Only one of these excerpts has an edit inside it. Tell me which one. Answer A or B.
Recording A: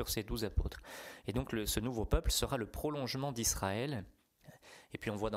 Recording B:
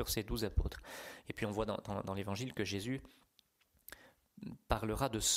B